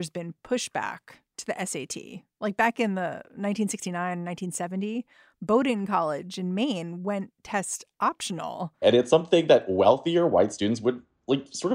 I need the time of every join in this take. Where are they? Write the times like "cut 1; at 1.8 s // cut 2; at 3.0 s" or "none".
cut 1; at 8.8 s